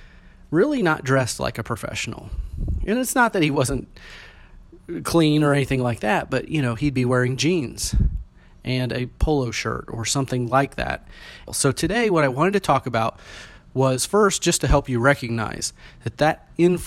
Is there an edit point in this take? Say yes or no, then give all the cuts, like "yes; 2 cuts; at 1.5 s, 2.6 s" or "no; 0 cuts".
yes; 1 cut; at 11.5 s